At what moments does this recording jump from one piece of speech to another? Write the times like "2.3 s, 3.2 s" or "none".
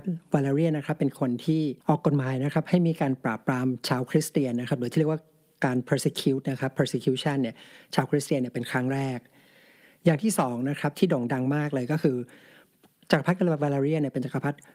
1.8 s